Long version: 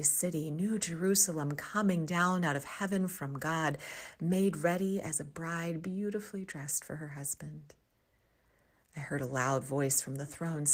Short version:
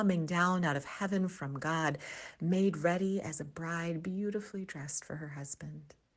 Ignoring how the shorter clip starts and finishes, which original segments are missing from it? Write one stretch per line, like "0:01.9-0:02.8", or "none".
none